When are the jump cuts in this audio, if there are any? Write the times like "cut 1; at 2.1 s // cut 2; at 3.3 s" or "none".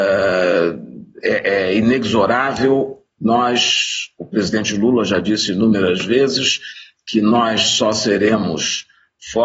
none

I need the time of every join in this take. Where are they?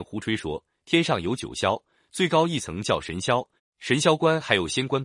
cut 1; at 3.6 s

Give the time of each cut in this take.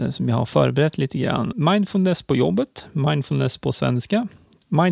cut 1; at 1.5 s

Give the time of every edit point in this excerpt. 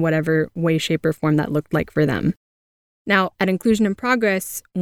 cut 1; at 2.9 s

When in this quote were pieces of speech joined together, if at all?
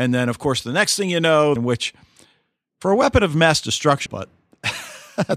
cut 1; at 1.6 s // cut 2; at 4.1 s

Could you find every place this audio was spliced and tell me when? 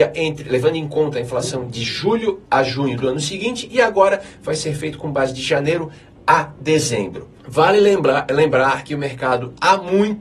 cut 1; at 7.4 s

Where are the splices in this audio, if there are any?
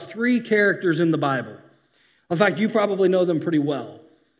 cut 1; at 2.2 s

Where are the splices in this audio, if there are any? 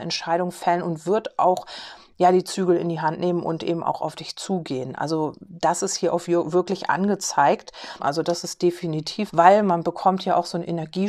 cut 1; at 8.0 s // cut 2; at 9.3 s

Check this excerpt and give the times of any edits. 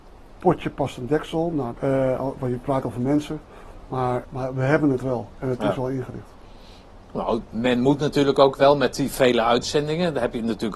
cut 1; at 1.8 s // cut 2; at 4.2 s

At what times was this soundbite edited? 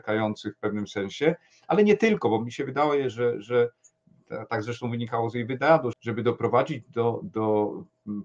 cut 1; at 5.9 s // cut 2; at 7.2 s

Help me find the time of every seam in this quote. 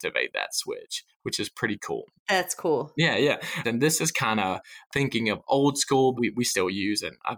cut 1; at 3.6 s // cut 2; at 6.1 s

